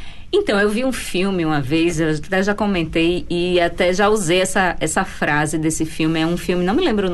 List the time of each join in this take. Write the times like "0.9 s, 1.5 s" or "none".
none